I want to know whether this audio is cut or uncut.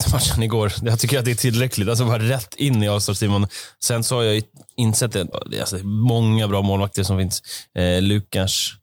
cut